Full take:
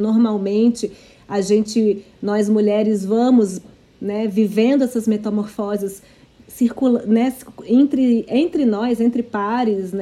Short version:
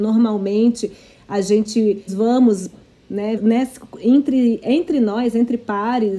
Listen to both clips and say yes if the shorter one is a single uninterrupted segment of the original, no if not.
no